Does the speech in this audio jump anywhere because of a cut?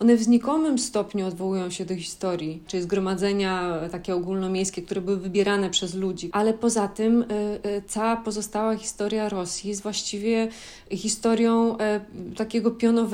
yes; 2 cuts; at 2.7 s, 6.3 s

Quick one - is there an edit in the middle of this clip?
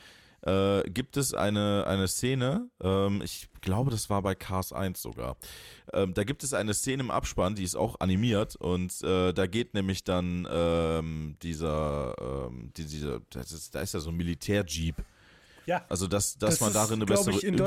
yes; 1 cut; at 15.9 s

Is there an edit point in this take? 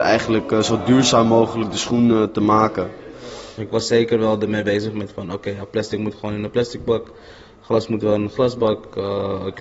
yes; 1 cut; at 3.6 s

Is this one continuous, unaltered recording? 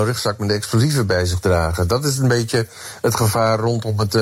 yes; 0 cuts

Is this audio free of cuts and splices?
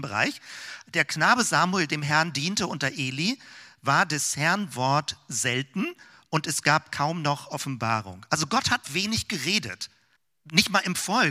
yes; 0 cuts

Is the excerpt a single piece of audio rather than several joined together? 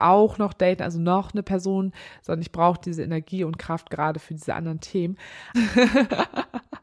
no; 1 cut; at 5.5 s

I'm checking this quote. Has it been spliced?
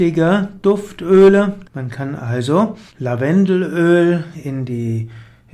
yes; 2 cuts; at 1.6 s, 2.9 s

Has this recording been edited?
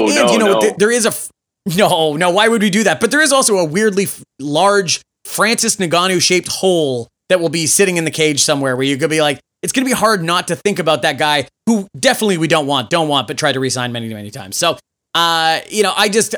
no; 0 cuts

